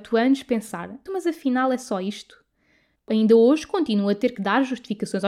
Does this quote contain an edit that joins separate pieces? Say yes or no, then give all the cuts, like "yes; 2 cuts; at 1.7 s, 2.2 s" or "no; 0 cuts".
yes; 2 cuts; at 1.1 s, 3.0 s